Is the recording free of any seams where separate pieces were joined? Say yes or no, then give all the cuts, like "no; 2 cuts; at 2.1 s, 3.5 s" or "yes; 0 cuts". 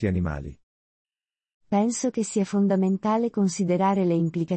no; 1 cut; at 1.6 s